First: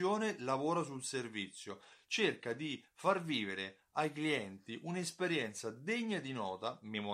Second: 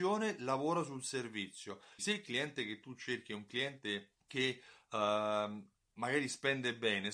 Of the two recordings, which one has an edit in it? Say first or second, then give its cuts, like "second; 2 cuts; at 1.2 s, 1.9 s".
second; 2 cuts; at 2.0 s, 4.2 s